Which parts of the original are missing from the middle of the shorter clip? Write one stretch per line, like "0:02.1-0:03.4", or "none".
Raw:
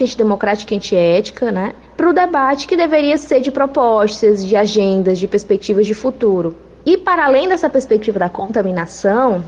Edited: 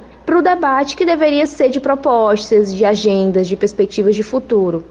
none